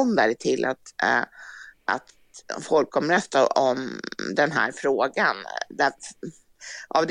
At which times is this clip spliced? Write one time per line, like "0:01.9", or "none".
none